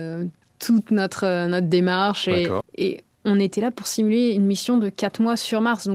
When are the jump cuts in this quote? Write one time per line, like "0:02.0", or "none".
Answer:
0:02.6